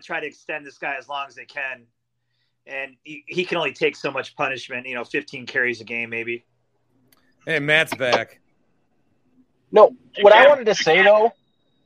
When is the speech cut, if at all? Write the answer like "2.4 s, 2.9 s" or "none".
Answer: none

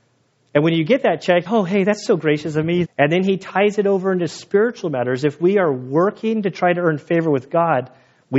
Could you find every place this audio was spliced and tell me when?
1.5 s, 2.8 s

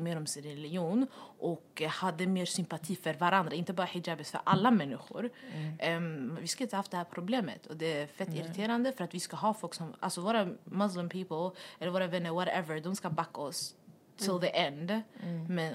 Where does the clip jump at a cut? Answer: none

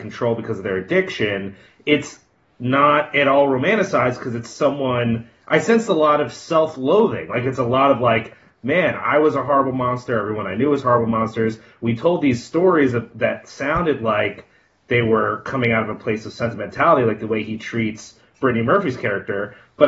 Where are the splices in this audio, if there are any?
none

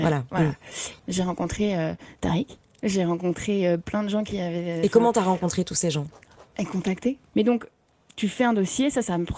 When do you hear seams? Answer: 1.0 s, 7.3 s

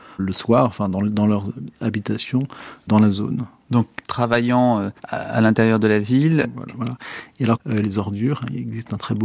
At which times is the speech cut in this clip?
5.0 s, 6.7 s, 7.8 s

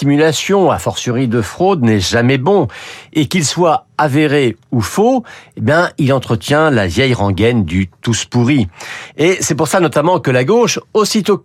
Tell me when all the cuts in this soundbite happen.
9.1 s

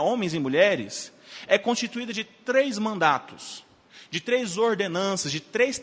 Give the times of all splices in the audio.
none

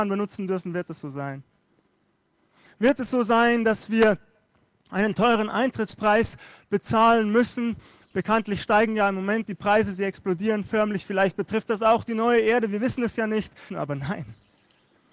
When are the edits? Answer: 13.7 s

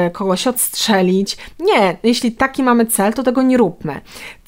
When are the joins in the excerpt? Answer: none

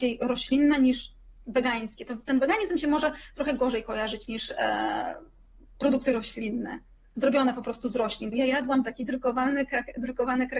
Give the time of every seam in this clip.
8.3 s

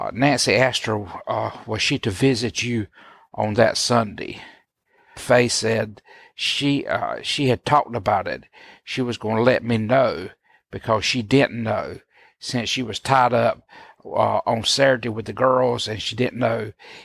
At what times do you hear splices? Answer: none

